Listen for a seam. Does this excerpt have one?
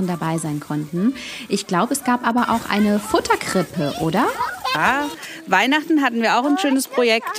no; 0 cuts

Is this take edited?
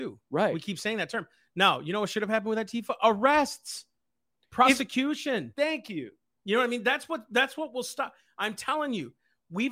no; 0 cuts

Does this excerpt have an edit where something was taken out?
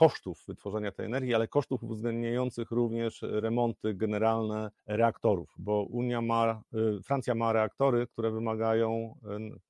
yes; 1 cut; at 4.8 s

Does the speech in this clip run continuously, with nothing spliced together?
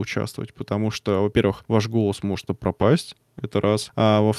no; 1 cut; at 2.5 s

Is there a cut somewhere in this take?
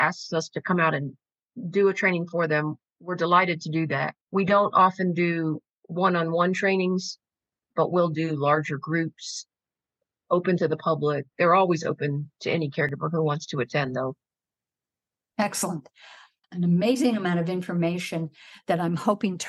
yes; 1 cut; at 4.2 s

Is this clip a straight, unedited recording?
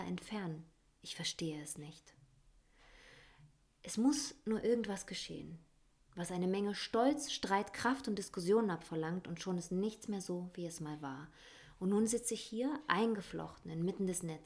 yes; 0 cuts

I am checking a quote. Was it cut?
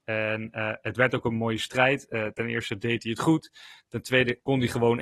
no; 0 cuts

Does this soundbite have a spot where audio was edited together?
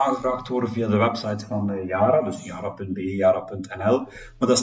no; 0 cuts

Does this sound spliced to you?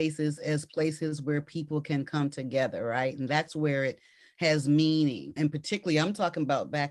no; 0 cuts

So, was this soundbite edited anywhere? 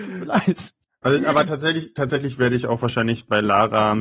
no; 0 cuts

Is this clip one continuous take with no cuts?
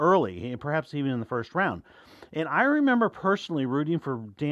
yes; 0 cuts

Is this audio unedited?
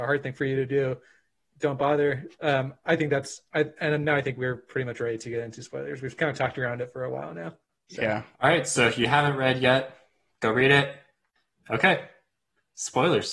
yes; 0 cuts

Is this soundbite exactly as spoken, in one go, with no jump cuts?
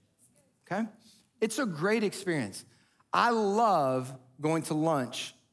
yes; 0 cuts

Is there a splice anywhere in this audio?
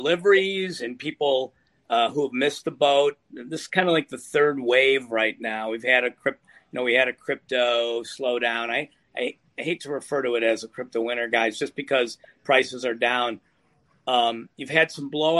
no; 0 cuts

